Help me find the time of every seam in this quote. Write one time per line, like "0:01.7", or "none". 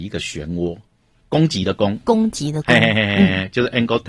0:01.2